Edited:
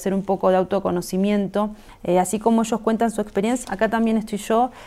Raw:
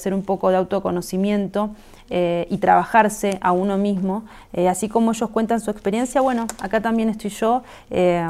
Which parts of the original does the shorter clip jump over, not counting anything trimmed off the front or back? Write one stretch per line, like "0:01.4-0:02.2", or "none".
0:01.9-0:04.4
0:06.1-0:06.6

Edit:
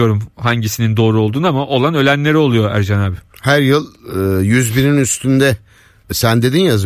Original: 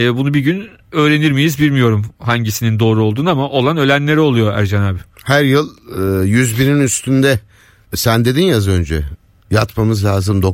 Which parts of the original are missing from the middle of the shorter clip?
none

